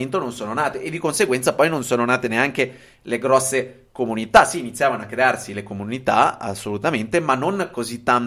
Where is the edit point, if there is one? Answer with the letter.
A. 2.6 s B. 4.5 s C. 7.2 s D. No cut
D